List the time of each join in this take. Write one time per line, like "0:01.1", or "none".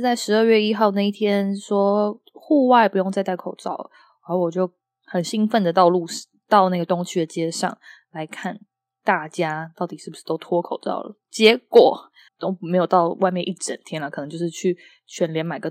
0:12.3